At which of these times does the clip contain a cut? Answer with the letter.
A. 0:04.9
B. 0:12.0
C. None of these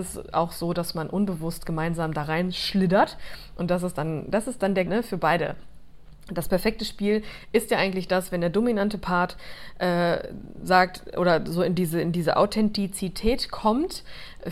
A